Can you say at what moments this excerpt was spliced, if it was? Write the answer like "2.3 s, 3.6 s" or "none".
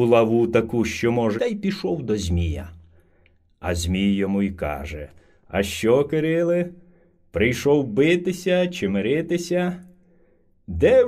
1.4 s